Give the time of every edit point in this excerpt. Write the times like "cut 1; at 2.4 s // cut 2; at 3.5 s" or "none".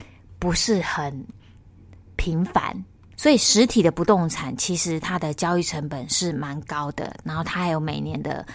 cut 1; at 3.2 s